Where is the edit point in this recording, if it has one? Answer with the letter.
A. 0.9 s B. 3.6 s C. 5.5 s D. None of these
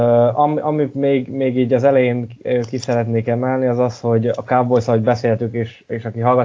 D